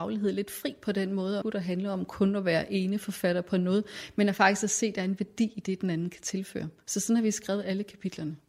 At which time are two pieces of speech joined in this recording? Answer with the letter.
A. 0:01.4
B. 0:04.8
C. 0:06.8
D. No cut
A